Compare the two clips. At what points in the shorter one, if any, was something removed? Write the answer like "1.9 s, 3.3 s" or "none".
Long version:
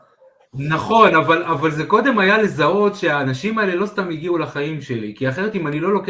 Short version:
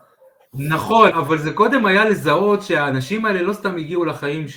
1.1 s